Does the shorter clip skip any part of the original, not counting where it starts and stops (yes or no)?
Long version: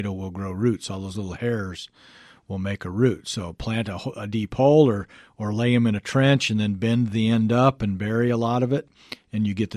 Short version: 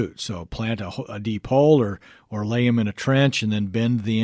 no